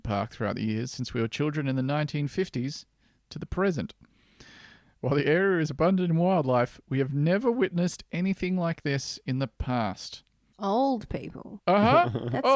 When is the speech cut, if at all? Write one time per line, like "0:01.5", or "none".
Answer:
0:10.5
0:11.6